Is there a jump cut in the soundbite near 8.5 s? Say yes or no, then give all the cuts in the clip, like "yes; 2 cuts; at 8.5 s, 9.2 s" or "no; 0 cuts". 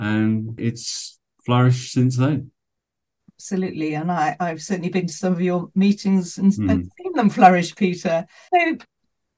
yes; 1 cut; at 8.5 s